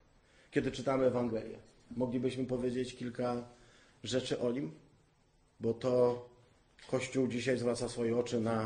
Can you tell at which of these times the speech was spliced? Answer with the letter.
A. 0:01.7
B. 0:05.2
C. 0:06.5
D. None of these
D